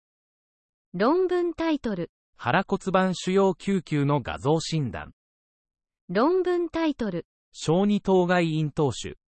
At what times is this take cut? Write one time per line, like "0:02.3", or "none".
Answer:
0:06.0